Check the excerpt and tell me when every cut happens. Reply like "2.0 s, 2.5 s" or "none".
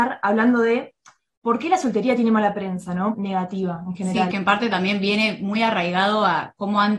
3.1 s, 4.3 s